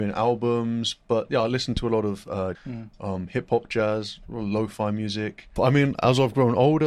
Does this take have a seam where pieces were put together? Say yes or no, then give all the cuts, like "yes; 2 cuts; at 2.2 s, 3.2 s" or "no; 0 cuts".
yes; 2 cuts; at 2.5 s, 5.6 s